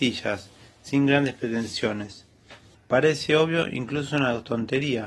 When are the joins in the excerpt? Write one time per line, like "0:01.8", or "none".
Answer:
0:02.7